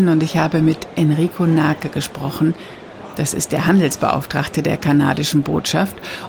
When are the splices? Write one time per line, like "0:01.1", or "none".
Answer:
none